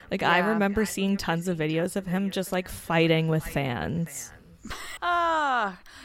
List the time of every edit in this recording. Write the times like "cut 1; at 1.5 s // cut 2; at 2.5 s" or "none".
cut 1; at 5.0 s

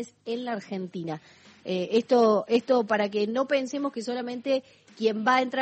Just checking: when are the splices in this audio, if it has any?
none

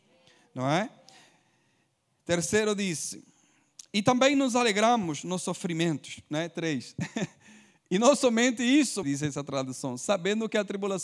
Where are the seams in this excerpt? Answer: cut 1; at 9.0 s

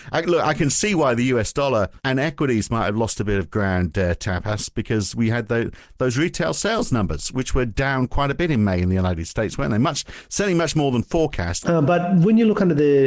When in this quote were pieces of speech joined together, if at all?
cut 1; at 2.0 s // cut 2; at 11.6 s

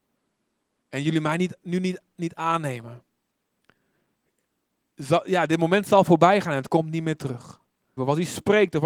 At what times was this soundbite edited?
cut 1; at 8.0 s

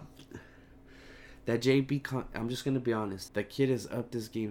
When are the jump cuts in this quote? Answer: cut 1; at 3.3 s

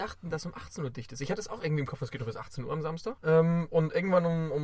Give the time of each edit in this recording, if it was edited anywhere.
cut 1; at 3.2 s

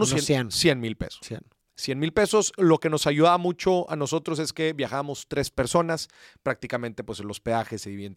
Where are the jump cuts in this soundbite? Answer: none

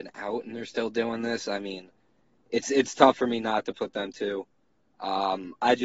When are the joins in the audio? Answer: none

